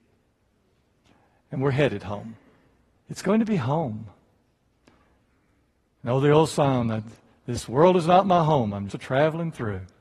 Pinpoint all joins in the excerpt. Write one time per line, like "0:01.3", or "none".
0:03.0
0:06.0
0:08.9